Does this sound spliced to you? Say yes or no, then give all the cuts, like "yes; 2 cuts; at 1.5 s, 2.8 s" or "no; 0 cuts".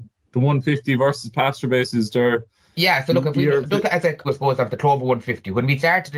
yes; 1 cut; at 4.2 s